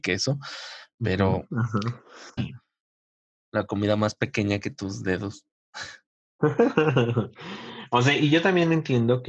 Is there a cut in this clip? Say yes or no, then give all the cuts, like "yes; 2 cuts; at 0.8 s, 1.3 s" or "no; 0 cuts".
yes; 1 cut; at 2.4 s